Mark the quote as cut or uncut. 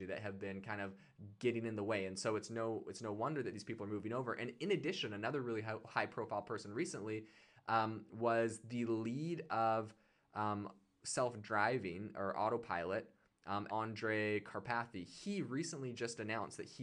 cut